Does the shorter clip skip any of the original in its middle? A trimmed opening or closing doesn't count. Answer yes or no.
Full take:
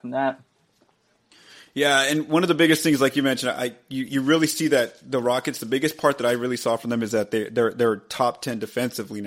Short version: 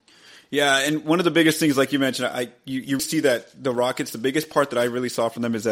yes